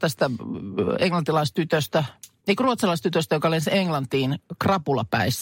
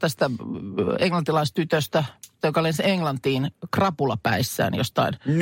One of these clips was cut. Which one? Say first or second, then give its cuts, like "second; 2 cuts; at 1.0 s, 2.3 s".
second; 1 cut; at 2.4 s